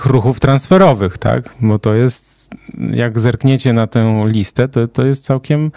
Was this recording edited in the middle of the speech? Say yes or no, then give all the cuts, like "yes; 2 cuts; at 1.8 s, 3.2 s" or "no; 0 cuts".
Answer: no; 0 cuts